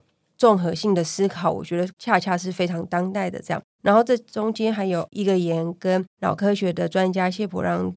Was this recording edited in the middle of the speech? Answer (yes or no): no